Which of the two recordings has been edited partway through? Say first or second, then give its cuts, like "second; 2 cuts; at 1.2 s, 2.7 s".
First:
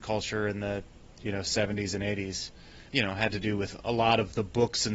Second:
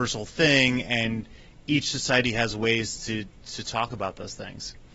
first; 1 cut; at 2.9 s